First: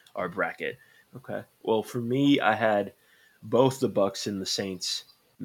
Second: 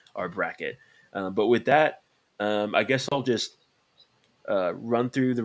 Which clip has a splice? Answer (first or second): first